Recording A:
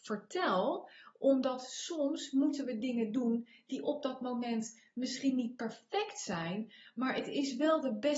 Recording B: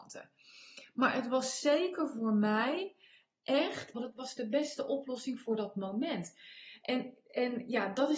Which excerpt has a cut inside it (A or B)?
B